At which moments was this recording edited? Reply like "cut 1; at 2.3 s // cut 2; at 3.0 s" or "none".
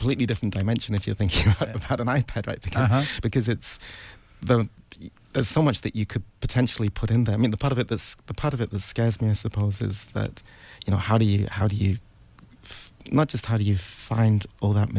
none

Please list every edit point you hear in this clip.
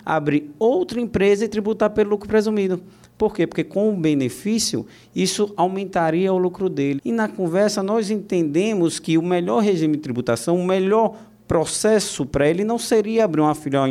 cut 1; at 7.0 s

